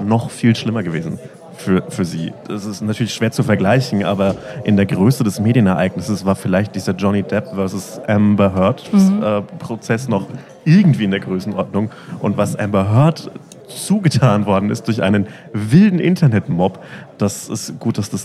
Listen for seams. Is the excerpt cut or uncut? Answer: uncut